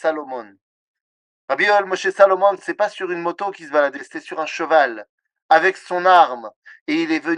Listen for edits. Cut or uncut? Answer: uncut